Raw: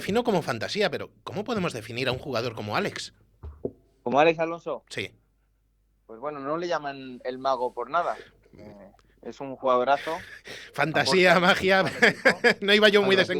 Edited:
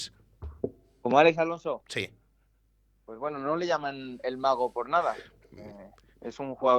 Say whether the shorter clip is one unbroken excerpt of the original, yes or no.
yes